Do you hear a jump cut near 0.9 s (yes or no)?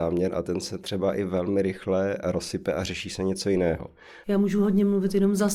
no